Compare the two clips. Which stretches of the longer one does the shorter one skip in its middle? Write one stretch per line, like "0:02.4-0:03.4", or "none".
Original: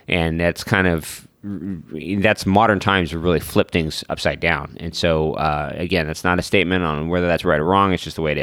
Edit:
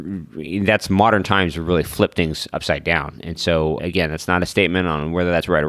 0:05.3-0:05.7